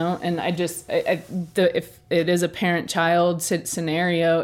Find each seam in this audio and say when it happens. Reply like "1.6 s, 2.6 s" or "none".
none